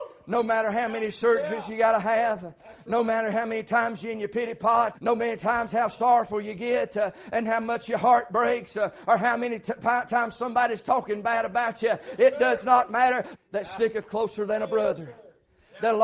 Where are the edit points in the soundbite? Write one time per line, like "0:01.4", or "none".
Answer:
0:04.9
0:13.4